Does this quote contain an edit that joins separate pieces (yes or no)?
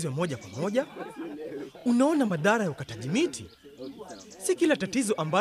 no